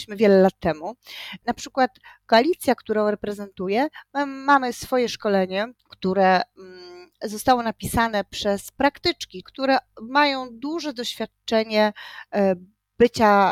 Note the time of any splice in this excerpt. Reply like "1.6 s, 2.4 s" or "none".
1.4 s, 5.8 s, 9.4 s